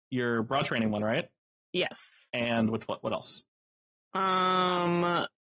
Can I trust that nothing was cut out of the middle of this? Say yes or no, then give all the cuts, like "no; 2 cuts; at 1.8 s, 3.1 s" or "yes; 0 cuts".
yes; 0 cuts